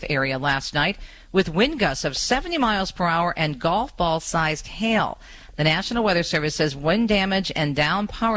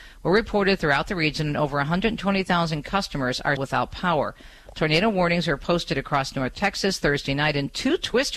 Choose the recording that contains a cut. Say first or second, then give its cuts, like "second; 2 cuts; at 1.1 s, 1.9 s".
second; 1 cut; at 3.6 s